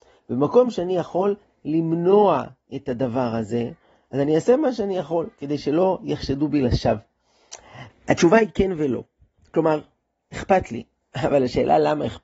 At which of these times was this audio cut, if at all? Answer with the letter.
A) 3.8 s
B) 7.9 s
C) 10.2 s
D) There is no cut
B